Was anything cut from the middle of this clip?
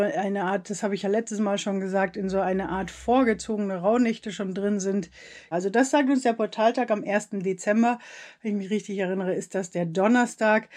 yes; 1 cut; at 5.5 s

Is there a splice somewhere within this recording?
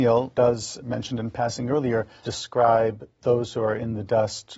no; 0 cuts

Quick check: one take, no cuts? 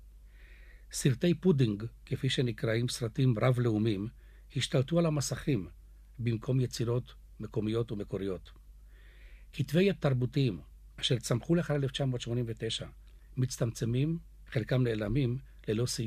yes; 0 cuts

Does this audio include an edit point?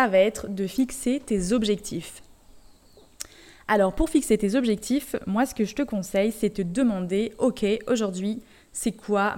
no; 0 cuts

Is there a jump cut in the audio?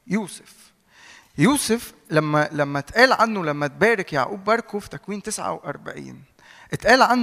no; 0 cuts

